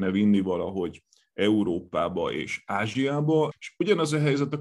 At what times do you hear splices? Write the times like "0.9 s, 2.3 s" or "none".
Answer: 3.5 s